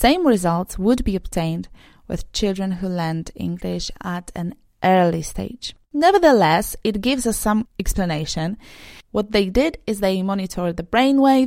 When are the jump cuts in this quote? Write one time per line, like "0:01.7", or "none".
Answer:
0:05.8
0:09.0